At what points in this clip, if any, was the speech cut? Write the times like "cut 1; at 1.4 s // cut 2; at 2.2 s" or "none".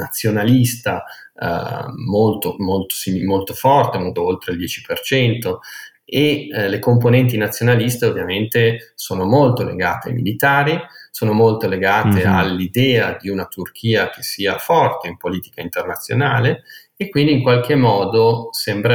cut 1; at 4.2 s